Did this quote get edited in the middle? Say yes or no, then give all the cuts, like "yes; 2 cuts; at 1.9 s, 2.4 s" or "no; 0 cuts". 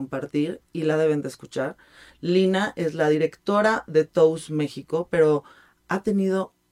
no; 0 cuts